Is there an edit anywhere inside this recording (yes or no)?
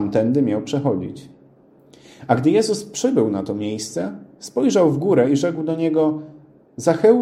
no